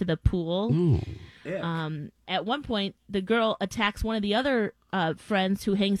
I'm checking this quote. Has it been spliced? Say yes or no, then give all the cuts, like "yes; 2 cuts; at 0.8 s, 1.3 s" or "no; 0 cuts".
yes; 1 cut; at 2.2 s